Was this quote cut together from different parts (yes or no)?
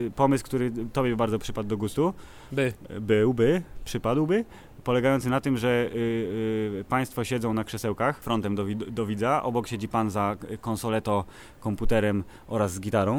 no